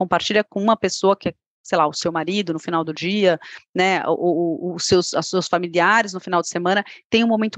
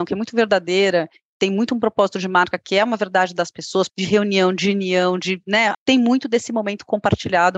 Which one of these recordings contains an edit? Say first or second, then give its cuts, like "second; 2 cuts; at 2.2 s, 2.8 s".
second; 2 cuts; at 3.9 s, 5.7 s